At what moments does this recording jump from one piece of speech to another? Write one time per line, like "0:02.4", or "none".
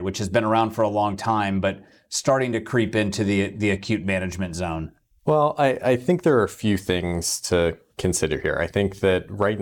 none